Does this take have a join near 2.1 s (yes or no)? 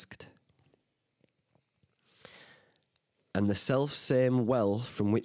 no